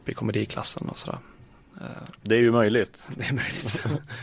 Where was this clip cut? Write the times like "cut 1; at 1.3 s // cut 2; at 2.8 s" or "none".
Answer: cut 1; at 2.2 s